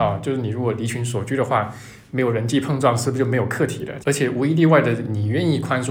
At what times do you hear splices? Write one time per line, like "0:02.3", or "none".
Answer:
0:04.0